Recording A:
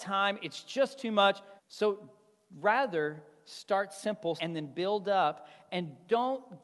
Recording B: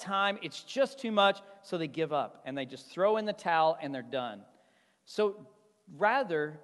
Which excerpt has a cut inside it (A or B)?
A